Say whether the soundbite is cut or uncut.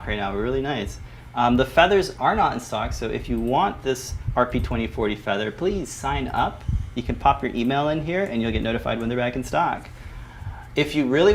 uncut